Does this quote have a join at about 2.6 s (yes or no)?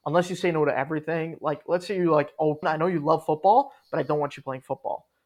yes